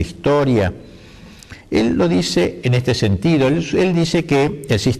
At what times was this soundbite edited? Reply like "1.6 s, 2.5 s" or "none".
none